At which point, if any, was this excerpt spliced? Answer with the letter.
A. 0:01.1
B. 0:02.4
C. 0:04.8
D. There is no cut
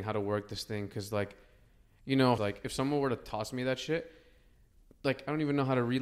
B